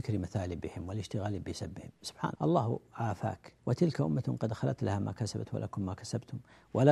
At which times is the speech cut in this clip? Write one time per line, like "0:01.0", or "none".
0:02.4
0:03.6